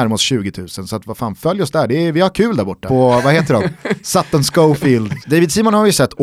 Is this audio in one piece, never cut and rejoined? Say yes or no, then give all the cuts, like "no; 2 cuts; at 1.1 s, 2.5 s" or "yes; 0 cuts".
no; 2 cuts; at 2.9 s, 5.2 s